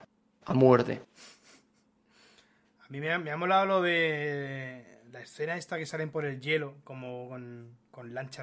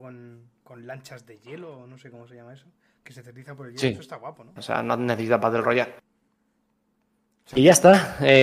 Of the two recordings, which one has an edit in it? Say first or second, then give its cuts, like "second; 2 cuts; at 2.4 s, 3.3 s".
second; 1 cut; at 4.6 s